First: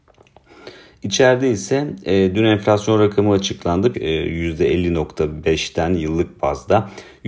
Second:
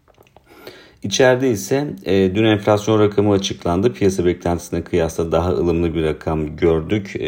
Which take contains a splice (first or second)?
first